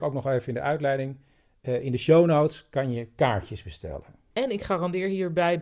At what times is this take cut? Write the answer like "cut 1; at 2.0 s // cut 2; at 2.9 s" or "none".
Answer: cut 1; at 4.3 s